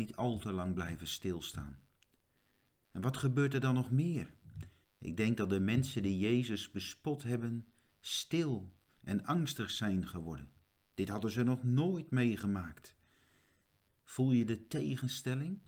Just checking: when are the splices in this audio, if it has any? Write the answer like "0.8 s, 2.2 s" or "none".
4.8 s, 13.9 s